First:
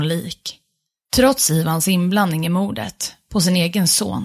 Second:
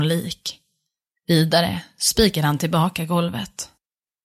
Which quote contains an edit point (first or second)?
first